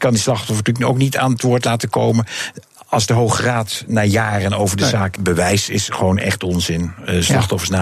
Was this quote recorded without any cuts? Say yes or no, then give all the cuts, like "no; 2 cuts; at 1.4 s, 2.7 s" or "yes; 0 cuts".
no; 1 cut; at 5.2 s